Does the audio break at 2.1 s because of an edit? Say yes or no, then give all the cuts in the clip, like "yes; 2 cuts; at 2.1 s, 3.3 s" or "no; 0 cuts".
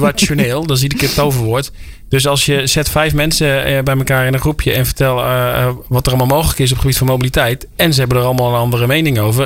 no; 0 cuts